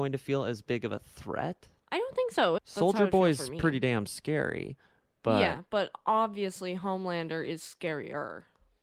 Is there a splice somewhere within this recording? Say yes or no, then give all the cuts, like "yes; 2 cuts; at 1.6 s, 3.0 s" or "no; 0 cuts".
yes; 1 cut; at 2.6 s